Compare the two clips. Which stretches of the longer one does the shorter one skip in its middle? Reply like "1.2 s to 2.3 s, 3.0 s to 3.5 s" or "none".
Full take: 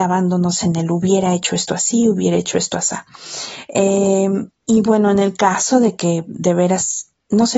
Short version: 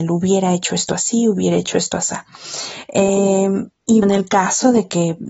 4.8 s to 5.1 s